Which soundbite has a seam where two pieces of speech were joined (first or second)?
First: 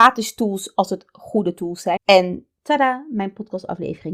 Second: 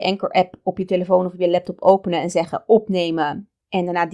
first